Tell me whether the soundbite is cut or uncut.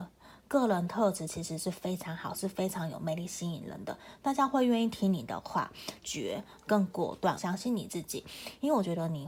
cut